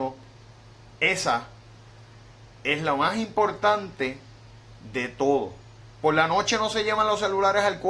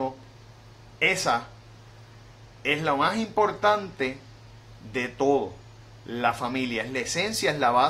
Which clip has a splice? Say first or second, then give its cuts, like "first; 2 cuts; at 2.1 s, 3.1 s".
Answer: first; 1 cut; at 5.8 s